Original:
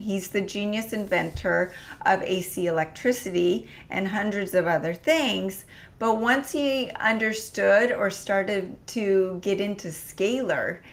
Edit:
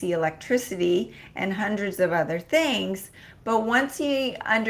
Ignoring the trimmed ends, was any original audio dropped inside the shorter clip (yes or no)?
no